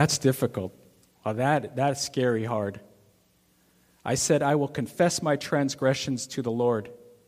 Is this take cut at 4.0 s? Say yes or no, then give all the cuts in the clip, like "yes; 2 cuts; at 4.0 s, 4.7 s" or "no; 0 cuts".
yes; 1 cut; at 4.0 s